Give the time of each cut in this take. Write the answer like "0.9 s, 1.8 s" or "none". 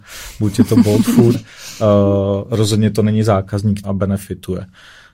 1.3 s, 3.8 s